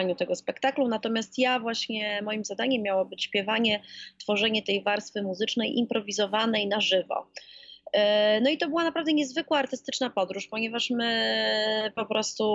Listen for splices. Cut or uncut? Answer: uncut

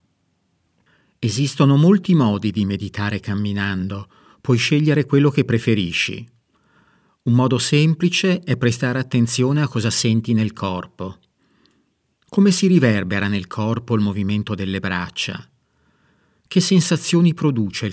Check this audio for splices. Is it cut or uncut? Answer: uncut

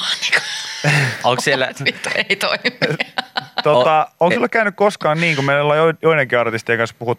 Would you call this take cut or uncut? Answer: uncut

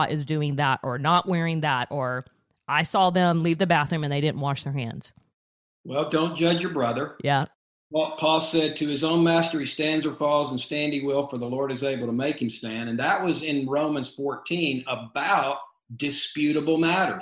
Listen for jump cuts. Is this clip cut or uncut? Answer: uncut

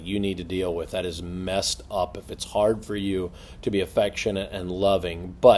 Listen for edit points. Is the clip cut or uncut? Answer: uncut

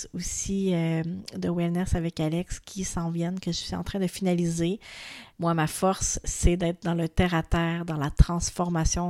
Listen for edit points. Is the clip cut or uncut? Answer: cut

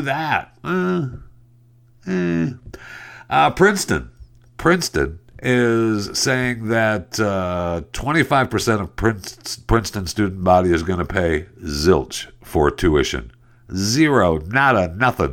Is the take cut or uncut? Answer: uncut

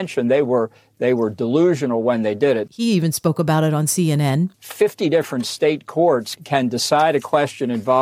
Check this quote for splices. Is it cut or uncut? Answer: cut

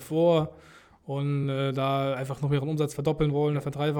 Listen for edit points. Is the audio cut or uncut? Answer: uncut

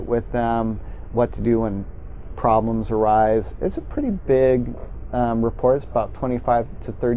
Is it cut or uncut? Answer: uncut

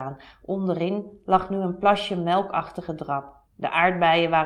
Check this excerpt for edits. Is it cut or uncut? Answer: cut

